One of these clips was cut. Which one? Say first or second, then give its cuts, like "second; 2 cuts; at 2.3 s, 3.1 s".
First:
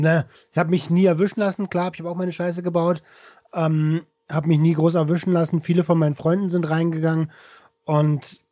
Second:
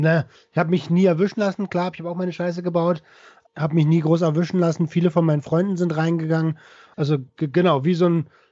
second; 2 cuts; at 3.5 s, 6.9 s